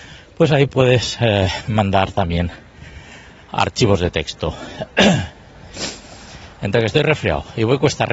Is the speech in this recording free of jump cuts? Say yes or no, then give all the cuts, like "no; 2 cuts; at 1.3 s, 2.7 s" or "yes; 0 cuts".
yes; 0 cuts